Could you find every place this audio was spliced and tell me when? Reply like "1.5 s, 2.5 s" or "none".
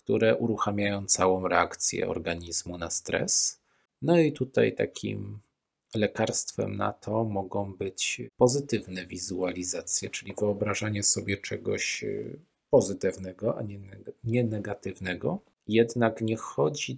none